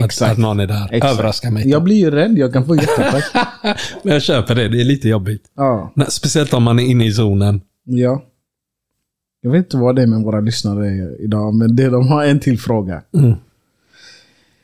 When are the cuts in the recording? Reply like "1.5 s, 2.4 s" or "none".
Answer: none